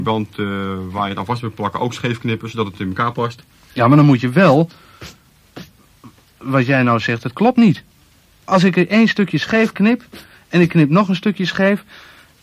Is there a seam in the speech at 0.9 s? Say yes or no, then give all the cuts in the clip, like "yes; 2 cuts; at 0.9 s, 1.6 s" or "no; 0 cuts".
no; 0 cuts